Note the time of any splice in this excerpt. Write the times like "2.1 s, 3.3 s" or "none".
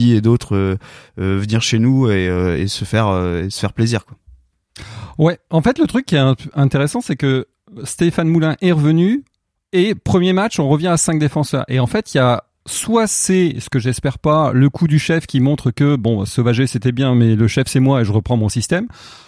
none